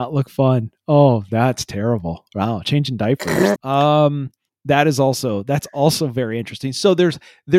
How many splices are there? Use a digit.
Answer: 1